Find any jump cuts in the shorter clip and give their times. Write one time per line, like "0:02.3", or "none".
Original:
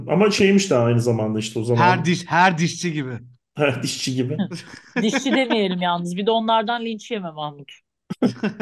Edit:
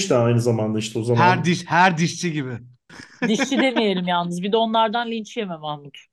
0:02.9